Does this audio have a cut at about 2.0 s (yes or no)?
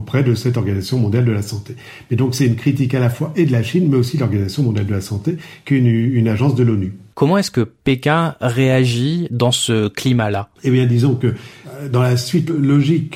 no